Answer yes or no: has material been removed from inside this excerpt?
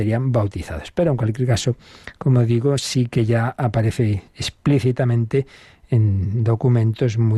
no